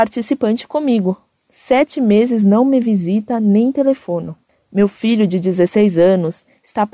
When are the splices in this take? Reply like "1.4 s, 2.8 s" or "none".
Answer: none